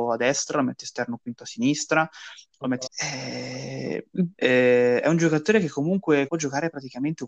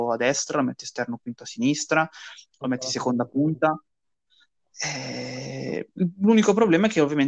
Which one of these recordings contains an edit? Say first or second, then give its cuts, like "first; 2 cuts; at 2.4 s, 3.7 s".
first; 3 cuts; at 2.9 s, 4.3 s, 6.3 s